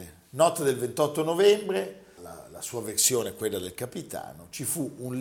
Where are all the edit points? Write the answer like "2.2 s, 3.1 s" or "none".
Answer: 2.2 s